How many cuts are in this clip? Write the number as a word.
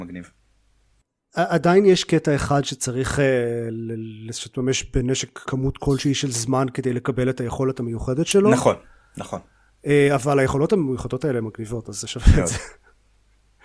one